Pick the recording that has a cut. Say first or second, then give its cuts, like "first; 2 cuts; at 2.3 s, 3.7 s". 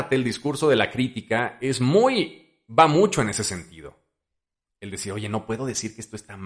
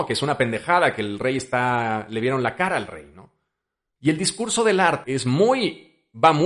second; 2 cuts; at 4.0 s, 5.0 s